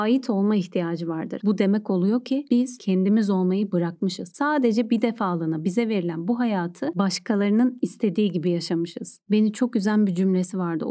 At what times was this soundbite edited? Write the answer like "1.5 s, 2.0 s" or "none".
1.4 s